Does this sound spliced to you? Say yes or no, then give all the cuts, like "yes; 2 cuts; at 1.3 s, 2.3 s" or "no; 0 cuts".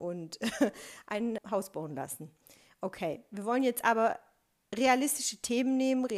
yes; 1 cut; at 1.4 s